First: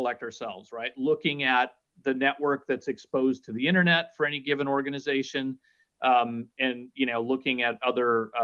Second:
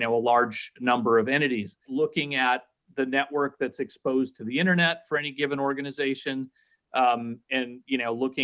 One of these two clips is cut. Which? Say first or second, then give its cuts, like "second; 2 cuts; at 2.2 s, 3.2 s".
second; 1 cut; at 1.8 s